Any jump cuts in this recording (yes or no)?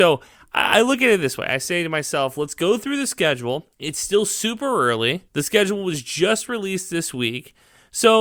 yes